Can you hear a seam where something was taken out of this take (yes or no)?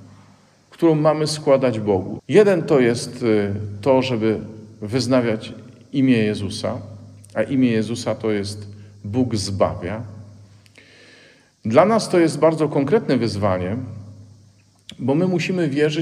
yes